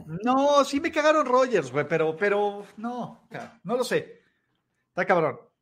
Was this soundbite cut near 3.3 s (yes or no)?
yes